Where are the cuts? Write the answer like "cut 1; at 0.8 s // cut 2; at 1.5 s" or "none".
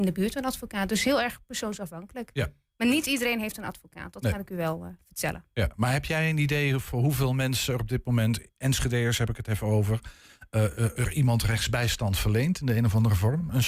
none